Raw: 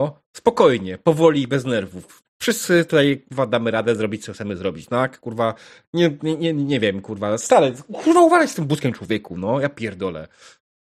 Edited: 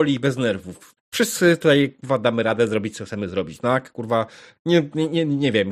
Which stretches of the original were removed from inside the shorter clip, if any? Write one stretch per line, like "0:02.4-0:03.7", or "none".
none